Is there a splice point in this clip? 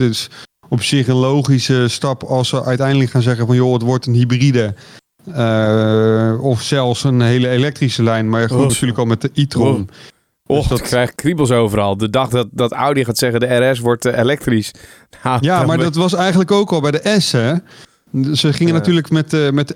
yes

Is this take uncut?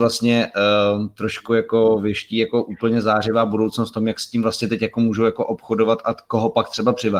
yes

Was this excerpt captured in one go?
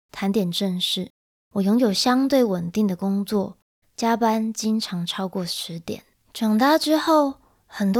no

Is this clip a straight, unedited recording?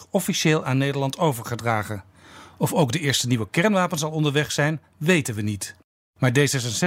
yes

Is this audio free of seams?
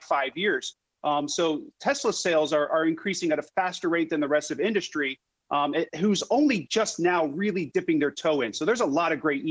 yes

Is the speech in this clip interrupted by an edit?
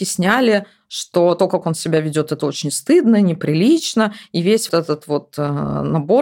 yes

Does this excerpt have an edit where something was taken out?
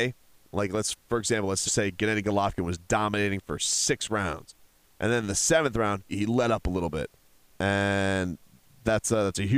yes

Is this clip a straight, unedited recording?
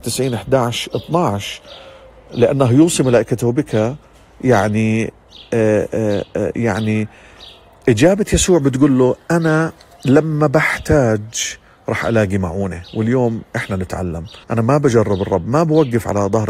no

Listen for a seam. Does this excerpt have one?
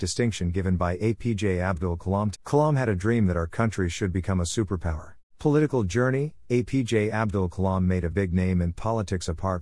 yes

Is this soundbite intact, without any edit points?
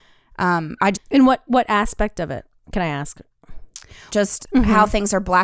no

